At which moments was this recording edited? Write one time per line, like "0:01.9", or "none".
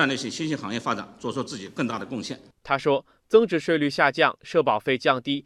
0:02.6
0:03.6